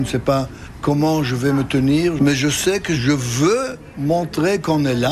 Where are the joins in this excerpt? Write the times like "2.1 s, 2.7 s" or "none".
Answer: 2.2 s